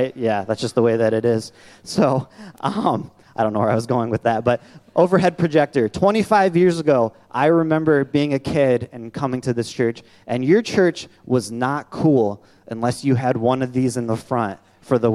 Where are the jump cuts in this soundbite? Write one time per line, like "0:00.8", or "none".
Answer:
none

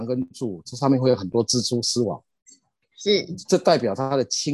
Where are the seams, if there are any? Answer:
0:03.4

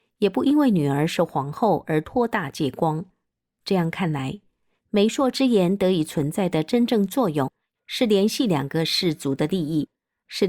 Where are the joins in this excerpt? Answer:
none

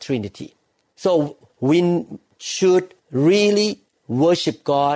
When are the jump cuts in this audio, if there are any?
0:01.5
0:03.0

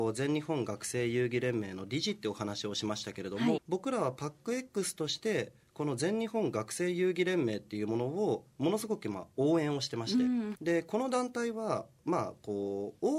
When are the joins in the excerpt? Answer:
0:03.6
0:10.5

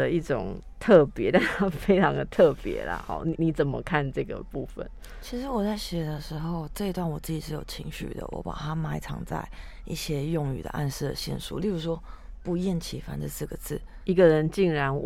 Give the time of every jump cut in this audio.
0:03.4
0:14.0

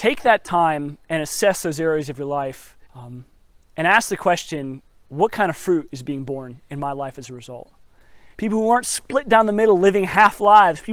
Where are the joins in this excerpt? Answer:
0:02.9
0:08.3

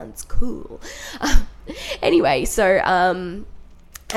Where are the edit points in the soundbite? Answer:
none

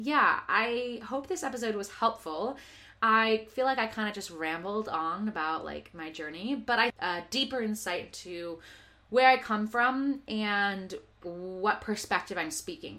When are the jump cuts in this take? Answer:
0:06.9
0:11.2

